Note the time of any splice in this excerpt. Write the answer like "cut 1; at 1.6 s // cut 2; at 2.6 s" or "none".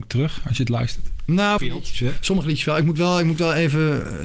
cut 1; at 1.6 s